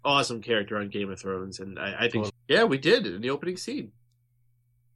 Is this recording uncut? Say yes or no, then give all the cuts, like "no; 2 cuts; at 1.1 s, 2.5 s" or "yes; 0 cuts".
no; 1 cut; at 2.3 s